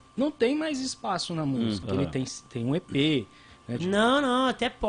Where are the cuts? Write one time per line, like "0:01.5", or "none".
0:01.8
0:03.8